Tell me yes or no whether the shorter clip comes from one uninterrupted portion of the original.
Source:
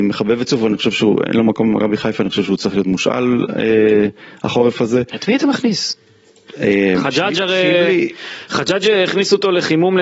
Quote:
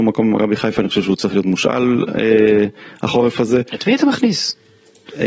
yes